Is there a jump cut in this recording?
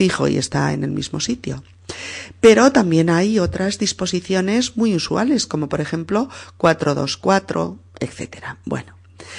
no; 0 cuts

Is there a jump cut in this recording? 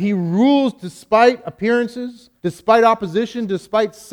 yes; 1 cut; at 2.4 s

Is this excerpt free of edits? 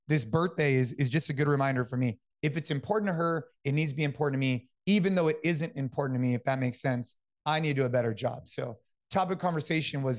yes; 0 cuts

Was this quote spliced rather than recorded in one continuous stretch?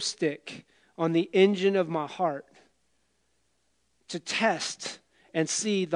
no; 0 cuts

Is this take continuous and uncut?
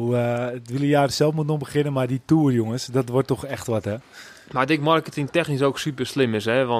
yes; 0 cuts

